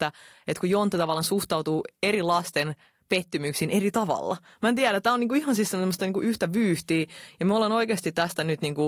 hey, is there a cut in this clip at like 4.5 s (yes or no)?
no